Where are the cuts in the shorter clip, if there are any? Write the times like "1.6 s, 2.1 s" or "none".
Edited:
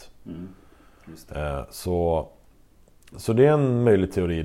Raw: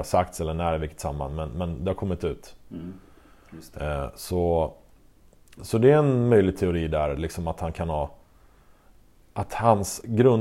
none

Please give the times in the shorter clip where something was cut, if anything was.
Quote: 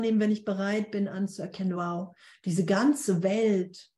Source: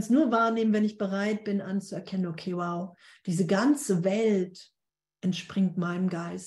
1.7 s

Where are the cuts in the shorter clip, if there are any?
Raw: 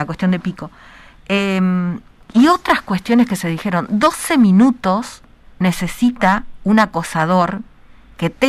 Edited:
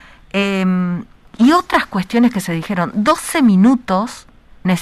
none

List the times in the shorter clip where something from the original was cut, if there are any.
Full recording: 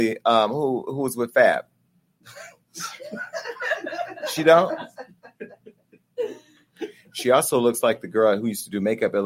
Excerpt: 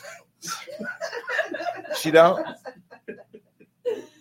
none

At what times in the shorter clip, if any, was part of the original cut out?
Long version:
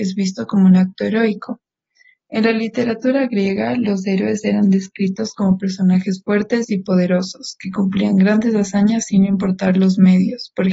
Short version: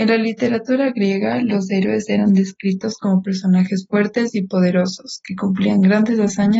none

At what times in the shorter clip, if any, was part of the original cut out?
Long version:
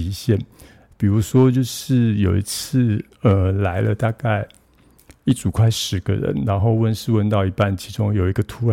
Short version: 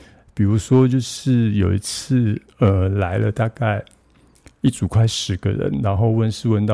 none

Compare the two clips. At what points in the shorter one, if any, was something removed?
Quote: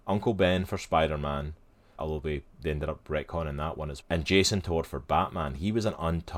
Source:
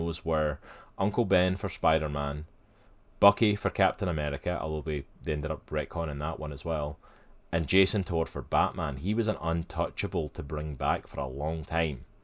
2.0 s, 4.0 s

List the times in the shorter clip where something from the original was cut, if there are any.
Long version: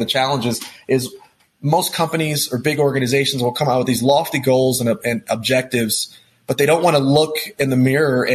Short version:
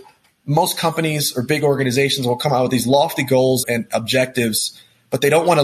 3.6 s

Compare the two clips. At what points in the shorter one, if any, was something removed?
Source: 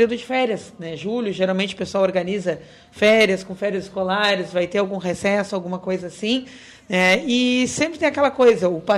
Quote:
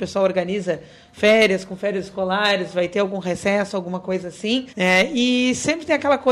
4.7 s

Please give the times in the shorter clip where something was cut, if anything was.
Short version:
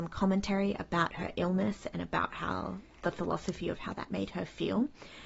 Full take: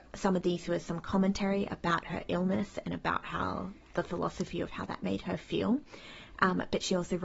none

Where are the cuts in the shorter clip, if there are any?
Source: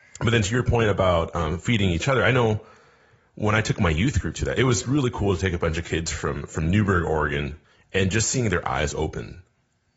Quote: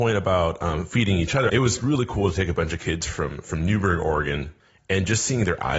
1.5 s

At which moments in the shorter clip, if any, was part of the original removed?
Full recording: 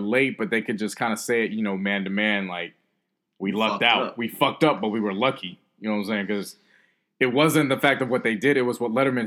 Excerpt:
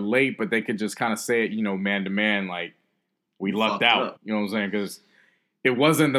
4.2 s

